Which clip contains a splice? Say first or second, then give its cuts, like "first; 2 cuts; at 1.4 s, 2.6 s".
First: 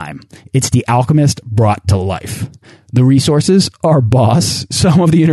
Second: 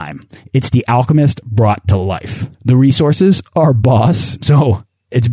second; 2 cuts; at 2.5 s, 4.4 s